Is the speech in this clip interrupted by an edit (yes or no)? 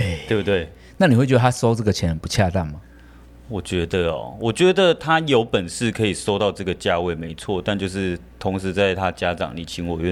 no